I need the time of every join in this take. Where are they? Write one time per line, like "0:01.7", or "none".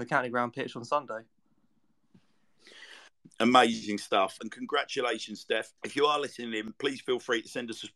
0:03.2
0:04.4
0:05.8